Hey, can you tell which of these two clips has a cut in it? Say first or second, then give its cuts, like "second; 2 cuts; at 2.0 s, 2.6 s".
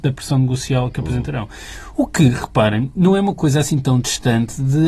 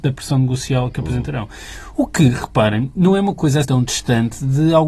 second; 1 cut; at 3.6 s